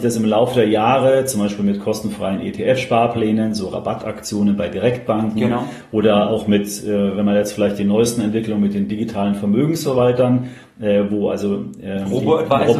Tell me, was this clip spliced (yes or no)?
no